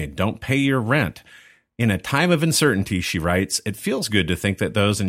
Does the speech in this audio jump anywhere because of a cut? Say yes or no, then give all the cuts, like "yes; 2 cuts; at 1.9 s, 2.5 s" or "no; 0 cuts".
no; 0 cuts